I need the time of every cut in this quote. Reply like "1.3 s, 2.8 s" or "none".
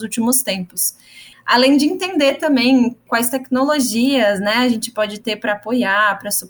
1.3 s